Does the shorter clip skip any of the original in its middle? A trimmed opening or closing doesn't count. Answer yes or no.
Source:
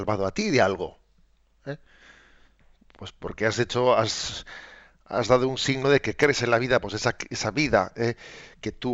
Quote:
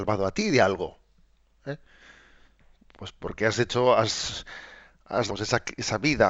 yes